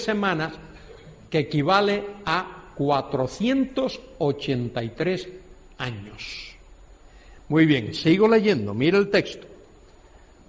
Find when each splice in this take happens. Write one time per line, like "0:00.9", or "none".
none